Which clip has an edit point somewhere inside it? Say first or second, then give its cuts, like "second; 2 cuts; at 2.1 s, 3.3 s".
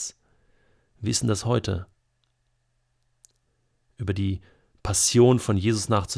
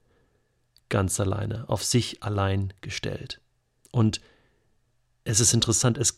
second; 1 cut; at 3.8 s